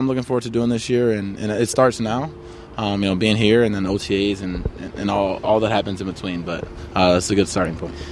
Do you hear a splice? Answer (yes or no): no